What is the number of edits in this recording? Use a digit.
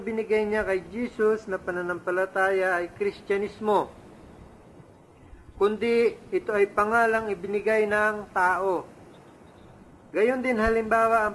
0